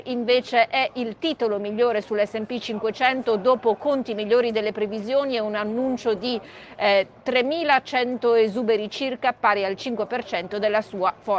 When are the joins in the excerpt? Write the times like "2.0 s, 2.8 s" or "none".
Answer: none

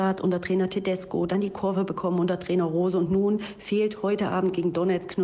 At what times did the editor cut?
none

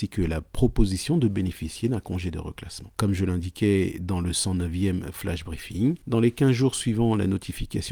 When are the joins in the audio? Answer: 2.9 s

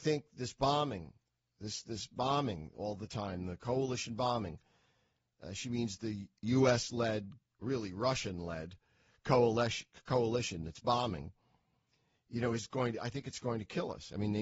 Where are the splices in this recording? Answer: 7.6 s

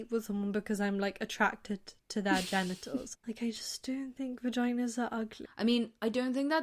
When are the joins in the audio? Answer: 3.1 s, 5.4 s

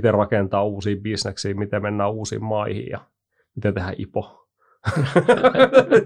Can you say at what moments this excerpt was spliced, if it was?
none

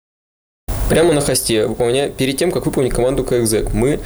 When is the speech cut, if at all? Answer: none

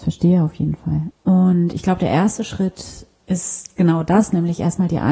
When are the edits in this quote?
1.1 s

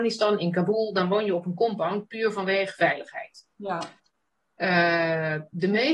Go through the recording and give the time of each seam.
none

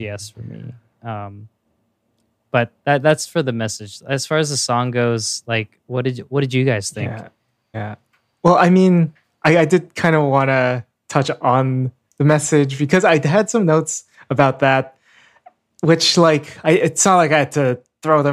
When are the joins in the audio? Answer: 7.7 s

